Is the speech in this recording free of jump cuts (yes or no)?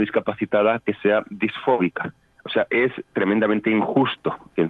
yes